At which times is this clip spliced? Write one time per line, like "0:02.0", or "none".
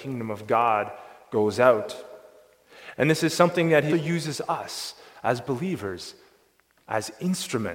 0:03.9